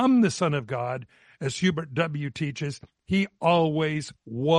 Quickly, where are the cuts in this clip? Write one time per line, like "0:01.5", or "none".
none